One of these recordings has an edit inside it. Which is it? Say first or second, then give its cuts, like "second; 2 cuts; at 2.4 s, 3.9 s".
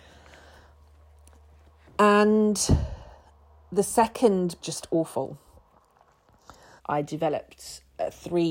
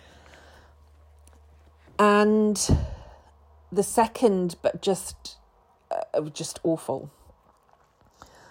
first; 2 cuts; at 4.6 s, 6.8 s